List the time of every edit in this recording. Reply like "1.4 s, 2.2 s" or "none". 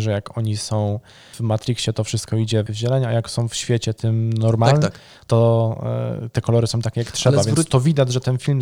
4.8 s